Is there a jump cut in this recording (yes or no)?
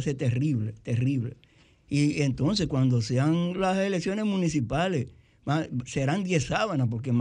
no